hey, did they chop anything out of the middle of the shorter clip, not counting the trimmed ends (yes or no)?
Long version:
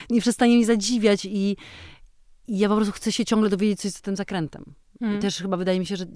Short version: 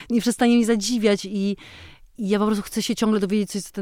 yes